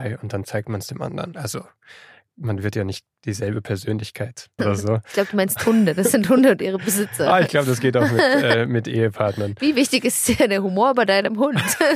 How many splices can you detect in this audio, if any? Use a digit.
1